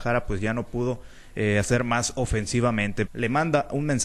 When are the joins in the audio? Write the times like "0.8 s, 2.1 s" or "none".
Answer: 3.1 s